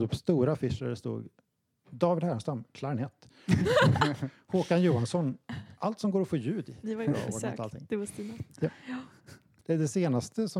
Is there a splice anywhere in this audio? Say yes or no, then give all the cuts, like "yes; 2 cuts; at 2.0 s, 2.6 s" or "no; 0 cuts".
yes; 1 cut; at 6.8 s